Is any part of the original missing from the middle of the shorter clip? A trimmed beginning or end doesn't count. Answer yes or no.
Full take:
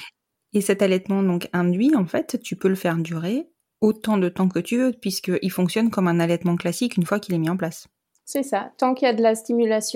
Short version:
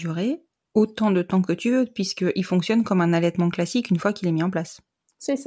no